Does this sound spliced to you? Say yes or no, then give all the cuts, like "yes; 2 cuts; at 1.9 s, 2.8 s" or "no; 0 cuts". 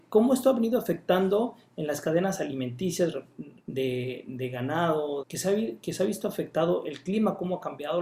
yes; 2 cuts; at 3.6 s, 5.2 s